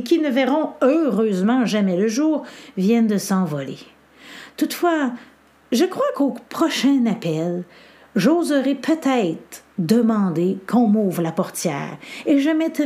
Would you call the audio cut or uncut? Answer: uncut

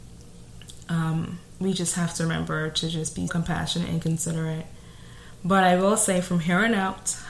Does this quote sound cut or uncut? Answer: cut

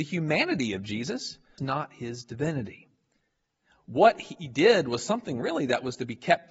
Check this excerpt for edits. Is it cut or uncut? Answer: cut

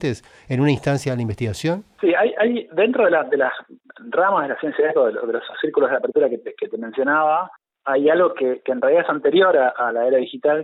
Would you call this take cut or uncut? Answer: uncut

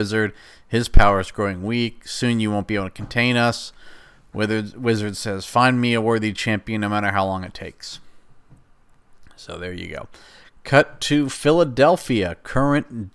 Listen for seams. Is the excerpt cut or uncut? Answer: uncut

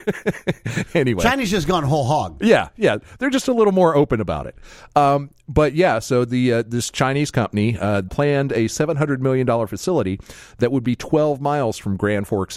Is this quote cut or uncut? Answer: cut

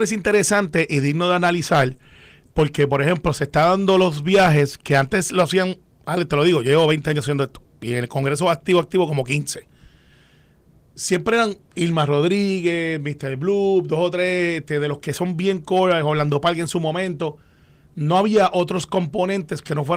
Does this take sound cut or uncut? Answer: uncut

